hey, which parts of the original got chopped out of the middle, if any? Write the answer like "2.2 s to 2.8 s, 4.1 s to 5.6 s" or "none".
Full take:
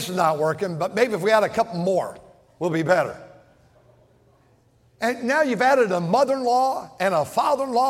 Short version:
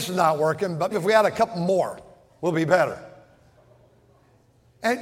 0.9 s to 1.1 s